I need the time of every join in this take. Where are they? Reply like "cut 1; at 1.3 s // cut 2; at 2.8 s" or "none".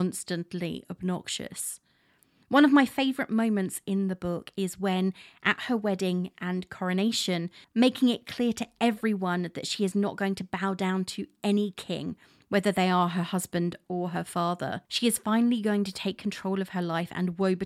cut 1; at 7.6 s // cut 2; at 14.9 s